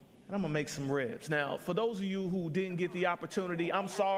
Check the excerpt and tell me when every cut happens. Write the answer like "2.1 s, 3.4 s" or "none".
none